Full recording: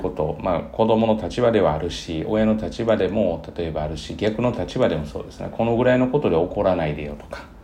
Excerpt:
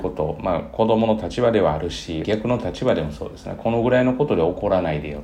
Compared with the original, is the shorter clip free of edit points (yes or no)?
no